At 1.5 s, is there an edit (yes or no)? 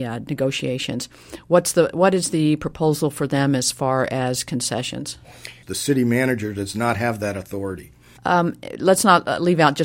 no